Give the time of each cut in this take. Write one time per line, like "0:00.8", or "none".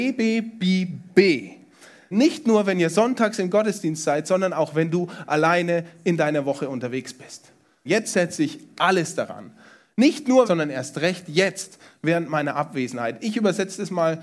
0:02.1
0:07.8
0:10.4